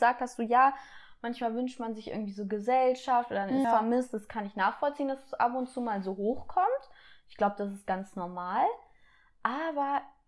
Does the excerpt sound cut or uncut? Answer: cut